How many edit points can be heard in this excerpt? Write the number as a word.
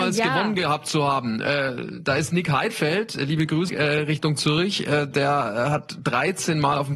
one